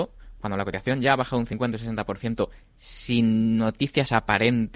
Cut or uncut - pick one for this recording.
uncut